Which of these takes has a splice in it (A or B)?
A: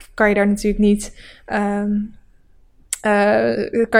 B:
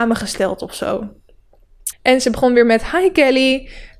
B